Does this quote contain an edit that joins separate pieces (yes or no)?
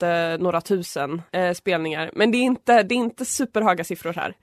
yes